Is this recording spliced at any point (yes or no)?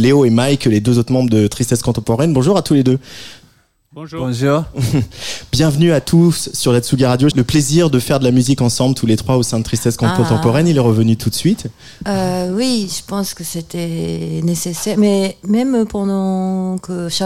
yes